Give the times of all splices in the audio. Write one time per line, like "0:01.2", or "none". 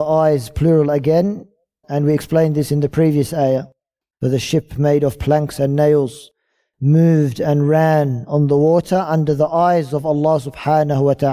0:01.8
0:04.1